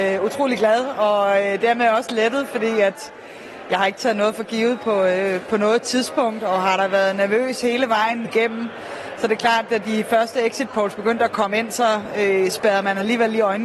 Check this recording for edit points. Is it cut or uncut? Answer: cut